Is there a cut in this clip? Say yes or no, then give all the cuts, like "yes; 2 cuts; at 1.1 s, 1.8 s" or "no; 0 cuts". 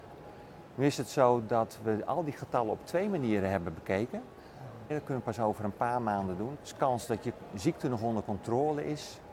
yes; 2 cuts; at 4.9 s, 6.6 s